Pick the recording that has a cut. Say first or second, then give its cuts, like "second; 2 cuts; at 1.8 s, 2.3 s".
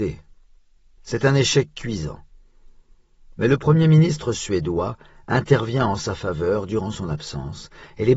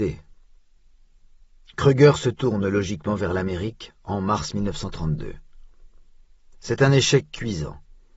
first; 1 cut; at 1.0 s